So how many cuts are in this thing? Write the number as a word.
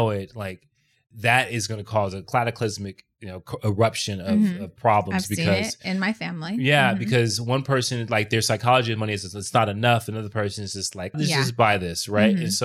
one